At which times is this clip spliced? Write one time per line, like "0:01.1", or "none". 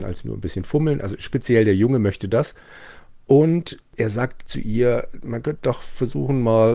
none